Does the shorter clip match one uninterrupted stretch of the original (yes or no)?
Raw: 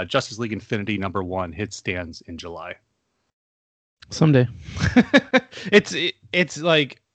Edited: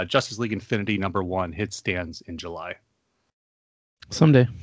yes